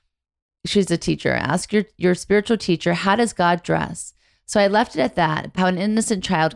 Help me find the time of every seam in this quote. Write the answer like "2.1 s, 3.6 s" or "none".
5.5 s